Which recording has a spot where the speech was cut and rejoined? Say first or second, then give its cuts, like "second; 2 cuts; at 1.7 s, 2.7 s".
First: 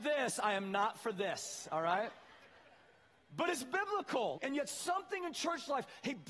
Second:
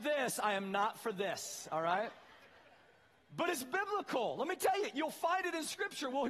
first; 1 cut; at 4.4 s